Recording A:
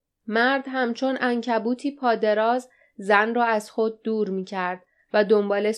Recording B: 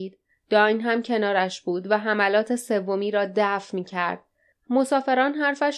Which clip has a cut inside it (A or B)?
B